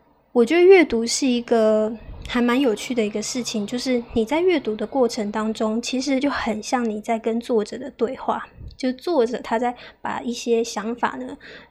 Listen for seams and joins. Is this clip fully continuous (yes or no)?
yes